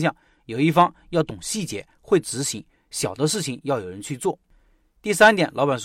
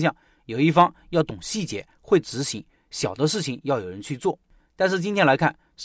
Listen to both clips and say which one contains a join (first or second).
second